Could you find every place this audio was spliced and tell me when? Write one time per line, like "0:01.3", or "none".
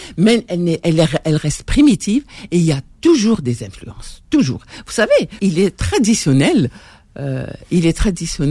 0:05.4